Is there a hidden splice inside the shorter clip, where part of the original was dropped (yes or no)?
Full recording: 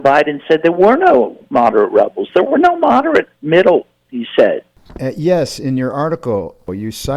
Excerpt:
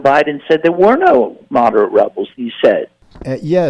yes